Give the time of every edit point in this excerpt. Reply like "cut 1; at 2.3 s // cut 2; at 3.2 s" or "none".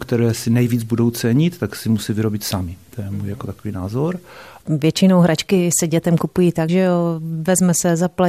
cut 1; at 4.6 s // cut 2; at 6.7 s

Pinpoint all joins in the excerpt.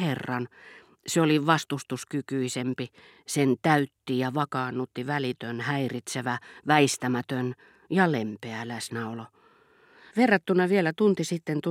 cut 1; at 10.1 s

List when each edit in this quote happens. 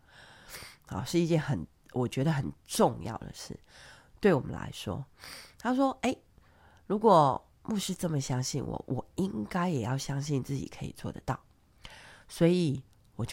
none

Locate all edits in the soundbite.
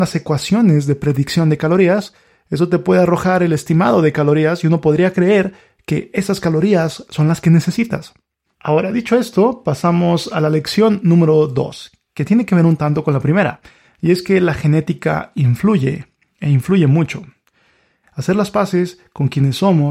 cut 1; at 8.5 s // cut 2; at 18.0 s

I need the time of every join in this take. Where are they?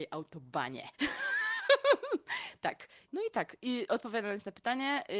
cut 1; at 3.1 s

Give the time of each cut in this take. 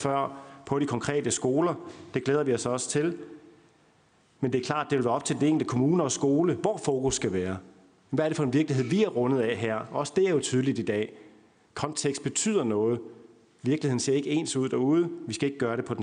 none

